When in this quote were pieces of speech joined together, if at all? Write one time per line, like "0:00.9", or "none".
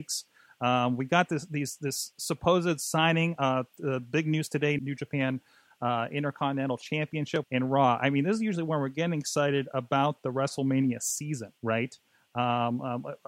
0:04.8
0:07.4
0:11.6